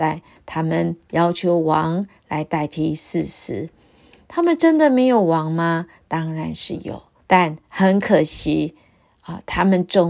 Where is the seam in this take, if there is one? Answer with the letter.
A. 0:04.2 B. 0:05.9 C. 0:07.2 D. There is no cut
C